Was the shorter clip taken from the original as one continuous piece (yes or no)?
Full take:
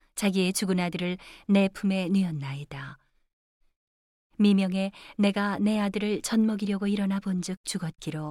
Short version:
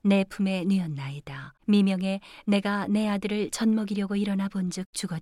no